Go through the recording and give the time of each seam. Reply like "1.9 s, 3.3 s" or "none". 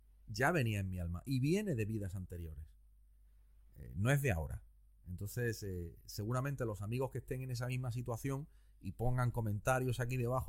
none